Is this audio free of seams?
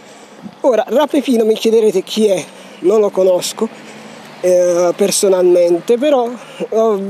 yes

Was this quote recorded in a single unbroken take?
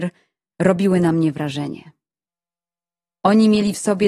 no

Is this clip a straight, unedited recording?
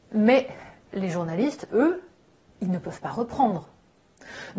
yes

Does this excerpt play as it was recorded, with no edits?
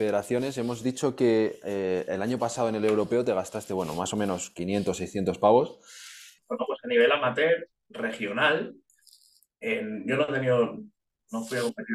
no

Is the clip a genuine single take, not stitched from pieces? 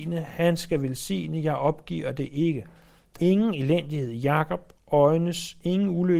no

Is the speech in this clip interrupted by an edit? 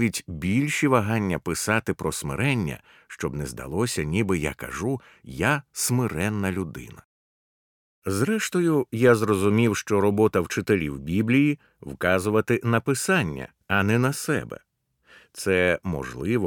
no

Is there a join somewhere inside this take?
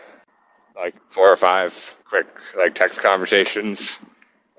yes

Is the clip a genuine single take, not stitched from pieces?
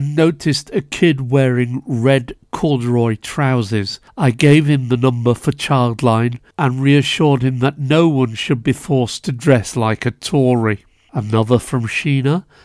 yes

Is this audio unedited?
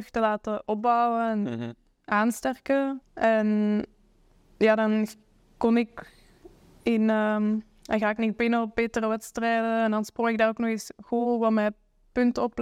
no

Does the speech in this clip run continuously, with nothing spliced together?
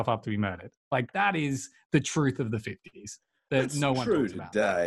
yes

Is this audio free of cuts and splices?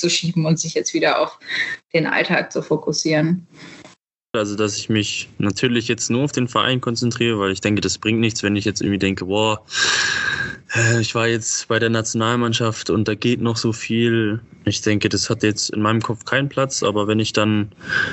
no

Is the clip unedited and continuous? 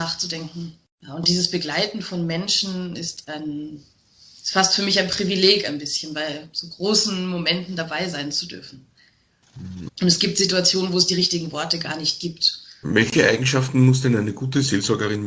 no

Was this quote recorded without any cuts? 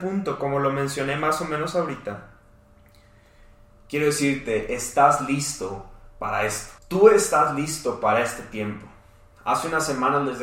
no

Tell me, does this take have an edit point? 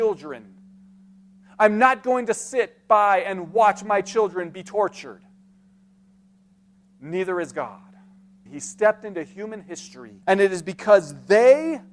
yes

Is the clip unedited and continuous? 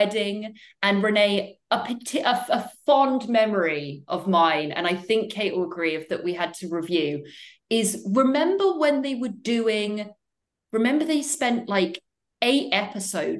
yes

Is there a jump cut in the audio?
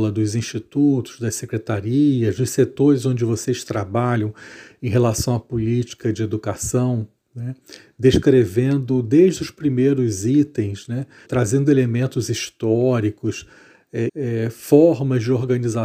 yes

